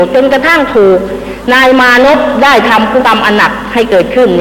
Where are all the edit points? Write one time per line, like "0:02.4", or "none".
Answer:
0:03.0